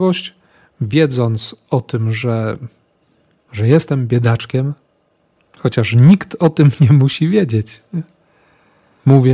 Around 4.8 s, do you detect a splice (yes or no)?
no